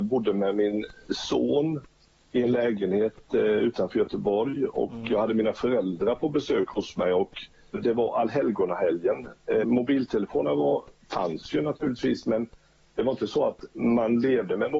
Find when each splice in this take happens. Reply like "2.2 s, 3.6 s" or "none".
7.7 s, 9.6 s